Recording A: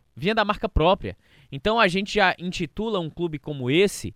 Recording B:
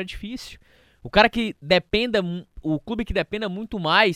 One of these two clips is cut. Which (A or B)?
B